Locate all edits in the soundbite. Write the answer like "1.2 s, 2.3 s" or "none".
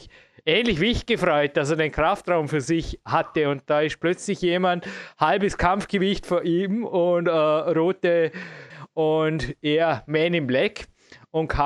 8.7 s